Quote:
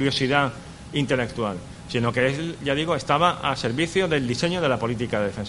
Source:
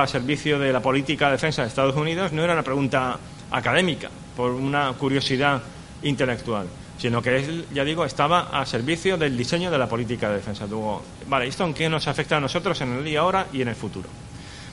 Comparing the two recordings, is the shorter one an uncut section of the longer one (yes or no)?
yes